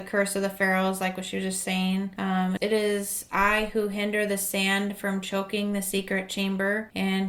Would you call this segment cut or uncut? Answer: cut